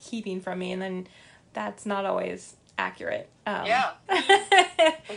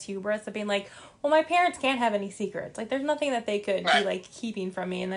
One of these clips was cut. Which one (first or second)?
first